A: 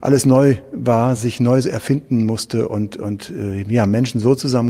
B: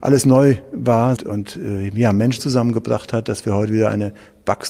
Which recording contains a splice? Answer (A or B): B